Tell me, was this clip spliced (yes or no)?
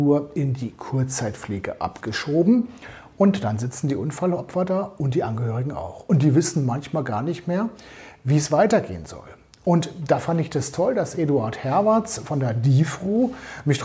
no